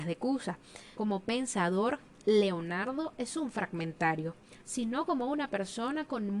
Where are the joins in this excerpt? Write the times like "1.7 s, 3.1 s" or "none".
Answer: 0.9 s, 4.6 s